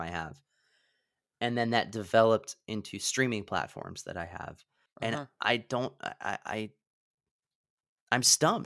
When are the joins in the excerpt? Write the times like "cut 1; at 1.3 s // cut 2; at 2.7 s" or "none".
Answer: cut 1; at 4.9 s